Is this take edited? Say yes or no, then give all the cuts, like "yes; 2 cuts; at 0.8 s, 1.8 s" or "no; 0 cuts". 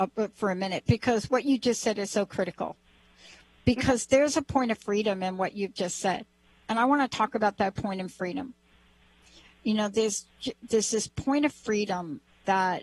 no; 0 cuts